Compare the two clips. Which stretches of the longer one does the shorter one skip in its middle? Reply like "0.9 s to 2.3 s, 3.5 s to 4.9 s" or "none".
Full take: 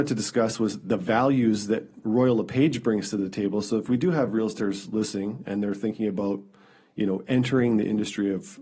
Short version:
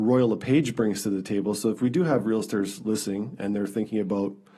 none